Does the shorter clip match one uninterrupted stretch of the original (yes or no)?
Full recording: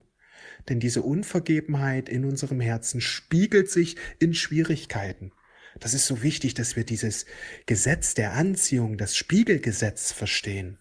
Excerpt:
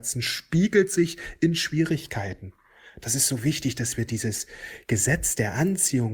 yes